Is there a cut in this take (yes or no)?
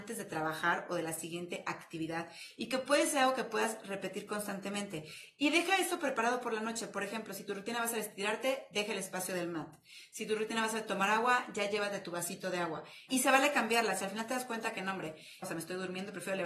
yes